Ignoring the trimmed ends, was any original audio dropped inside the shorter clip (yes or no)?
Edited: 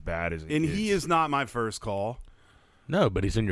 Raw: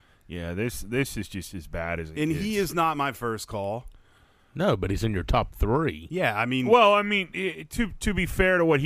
no